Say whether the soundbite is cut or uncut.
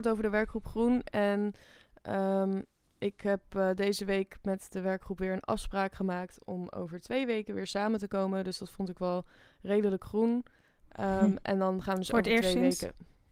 uncut